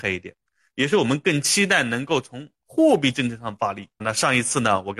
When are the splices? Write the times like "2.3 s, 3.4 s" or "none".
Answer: 4.0 s

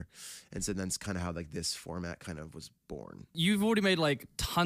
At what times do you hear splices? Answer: none

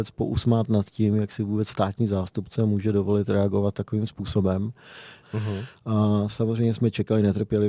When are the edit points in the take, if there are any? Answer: 5.2 s

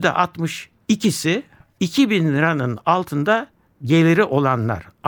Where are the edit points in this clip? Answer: none

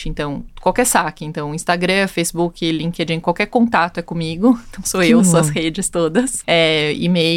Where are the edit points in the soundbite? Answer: 5.2 s, 6.4 s

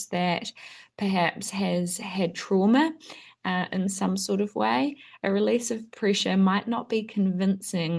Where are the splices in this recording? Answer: none

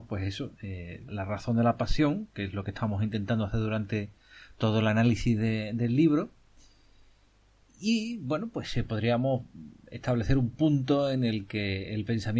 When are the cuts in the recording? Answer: 1.1 s

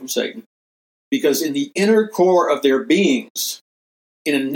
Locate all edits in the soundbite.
0.9 s

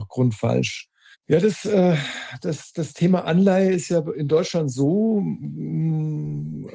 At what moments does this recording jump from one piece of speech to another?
1.1 s

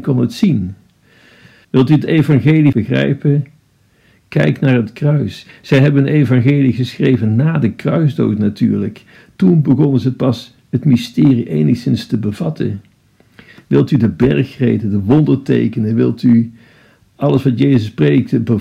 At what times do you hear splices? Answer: 1.6 s

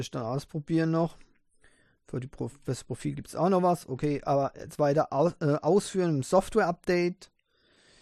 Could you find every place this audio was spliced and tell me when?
2.0 s

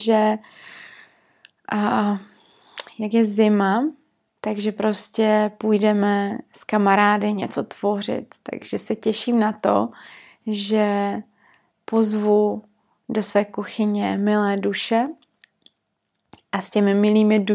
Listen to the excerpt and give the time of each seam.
none

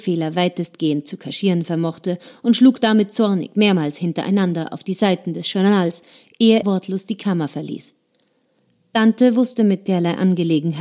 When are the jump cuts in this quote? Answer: 6.6 s

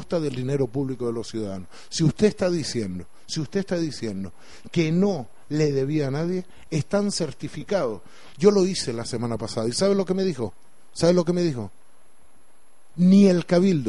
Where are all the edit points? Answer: 6.7 s, 8.3 s

